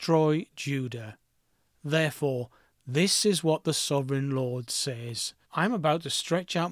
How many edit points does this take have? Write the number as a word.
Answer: one